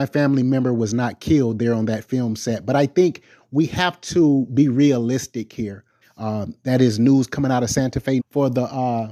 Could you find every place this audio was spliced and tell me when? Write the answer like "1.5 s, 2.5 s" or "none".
6.0 s, 8.2 s